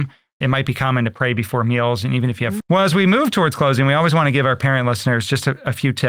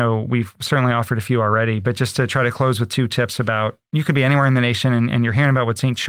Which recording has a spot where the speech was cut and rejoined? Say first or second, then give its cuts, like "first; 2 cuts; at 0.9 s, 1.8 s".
first; 1 cut; at 2.6 s